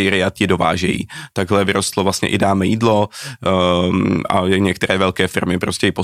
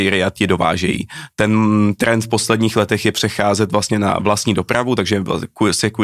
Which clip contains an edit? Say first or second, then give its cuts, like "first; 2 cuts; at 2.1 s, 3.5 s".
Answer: second; 1 cut; at 1.3 s